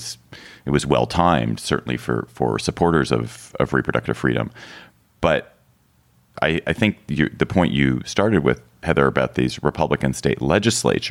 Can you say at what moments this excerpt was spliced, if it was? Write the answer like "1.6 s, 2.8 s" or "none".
6.3 s